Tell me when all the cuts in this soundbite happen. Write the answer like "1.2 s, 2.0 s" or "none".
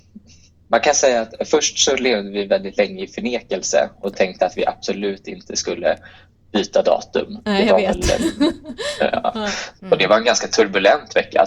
9.8 s